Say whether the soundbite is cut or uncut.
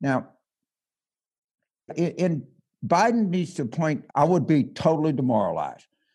cut